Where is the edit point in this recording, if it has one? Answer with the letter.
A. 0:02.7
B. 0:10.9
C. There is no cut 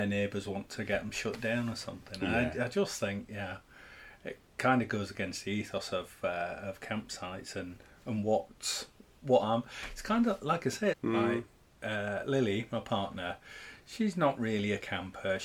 B